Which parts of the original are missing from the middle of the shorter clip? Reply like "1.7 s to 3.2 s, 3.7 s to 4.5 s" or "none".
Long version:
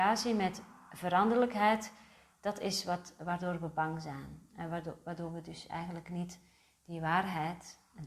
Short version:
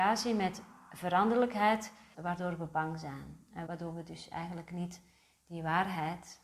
2.1 s to 3.2 s, 4.7 s to 5.0 s

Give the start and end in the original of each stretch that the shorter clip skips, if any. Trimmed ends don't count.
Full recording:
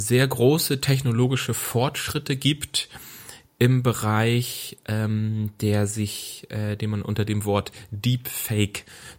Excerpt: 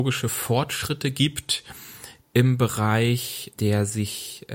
4.8 s to 5.6 s

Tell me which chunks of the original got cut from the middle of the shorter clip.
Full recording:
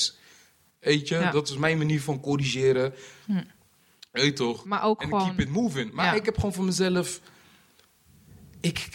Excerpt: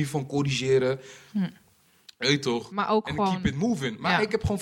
none

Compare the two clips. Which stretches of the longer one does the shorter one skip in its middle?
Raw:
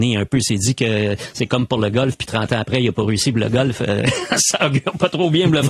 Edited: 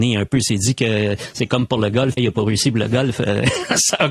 2.2 s to 2.8 s

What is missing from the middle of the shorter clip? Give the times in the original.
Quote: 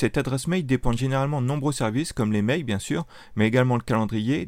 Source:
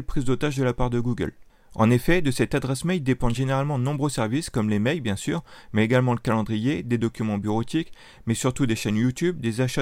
none

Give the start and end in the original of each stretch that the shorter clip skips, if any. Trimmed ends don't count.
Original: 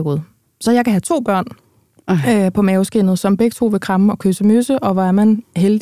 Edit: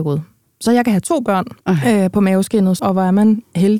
1.6 s to 2.0 s, 3.2 s to 4.8 s

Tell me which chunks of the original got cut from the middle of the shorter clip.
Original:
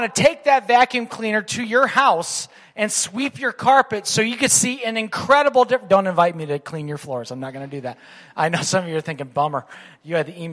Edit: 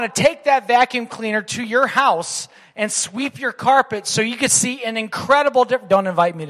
none

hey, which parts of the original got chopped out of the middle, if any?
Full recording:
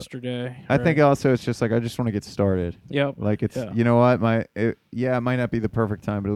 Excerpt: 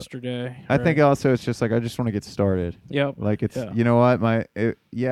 none

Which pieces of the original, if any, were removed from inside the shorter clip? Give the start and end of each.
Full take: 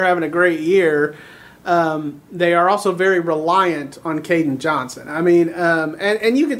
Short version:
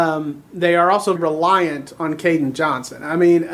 2.9 s to 3.2 s

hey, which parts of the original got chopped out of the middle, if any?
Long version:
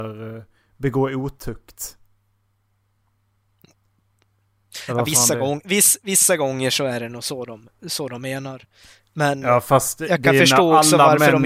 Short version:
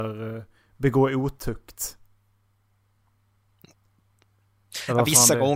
none

